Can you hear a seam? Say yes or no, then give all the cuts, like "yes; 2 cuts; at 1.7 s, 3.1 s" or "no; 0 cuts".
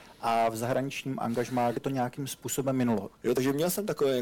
yes; 2 cuts; at 1.7 s, 3.1 s